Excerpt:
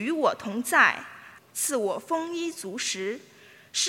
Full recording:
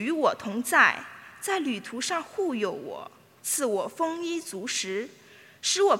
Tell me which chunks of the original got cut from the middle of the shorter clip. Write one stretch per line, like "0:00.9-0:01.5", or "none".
0:01.4-0:03.3